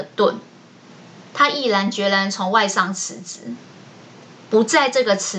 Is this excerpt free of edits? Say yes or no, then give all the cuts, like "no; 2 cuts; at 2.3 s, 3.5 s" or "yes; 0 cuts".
no; 1 cut; at 1.2 s